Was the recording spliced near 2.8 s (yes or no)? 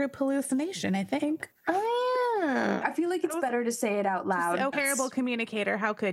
yes